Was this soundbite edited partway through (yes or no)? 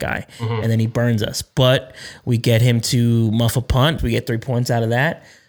yes